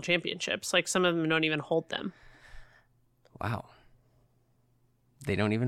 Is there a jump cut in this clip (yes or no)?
no